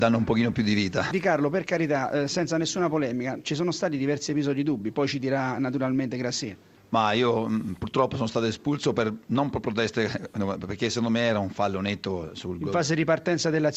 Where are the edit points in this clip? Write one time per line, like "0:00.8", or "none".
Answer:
none